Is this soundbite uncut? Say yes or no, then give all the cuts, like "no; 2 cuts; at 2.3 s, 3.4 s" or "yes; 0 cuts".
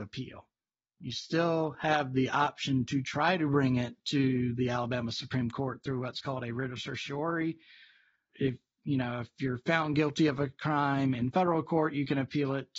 no; 1 cut; at 8.3 s